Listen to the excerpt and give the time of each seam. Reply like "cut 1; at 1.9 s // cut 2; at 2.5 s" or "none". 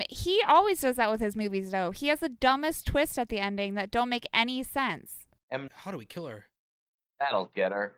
cut 1; at 5.7 s